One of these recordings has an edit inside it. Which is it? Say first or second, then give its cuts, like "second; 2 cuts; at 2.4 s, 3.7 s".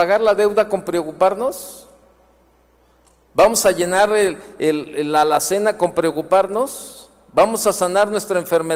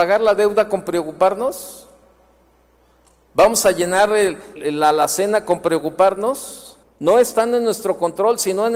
second; 2 cuts; at 4.6 s, 6.8 s